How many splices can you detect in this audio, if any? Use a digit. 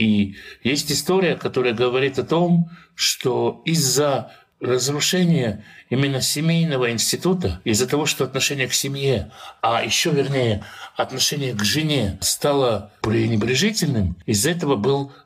0